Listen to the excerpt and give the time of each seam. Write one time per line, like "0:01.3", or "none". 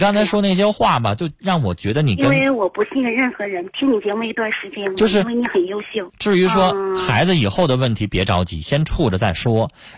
0:04.9
0:06.1